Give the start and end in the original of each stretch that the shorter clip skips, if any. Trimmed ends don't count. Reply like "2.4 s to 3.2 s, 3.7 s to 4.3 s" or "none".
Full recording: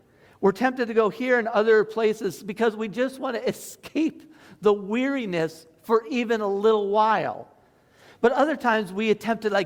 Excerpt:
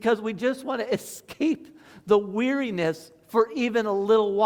none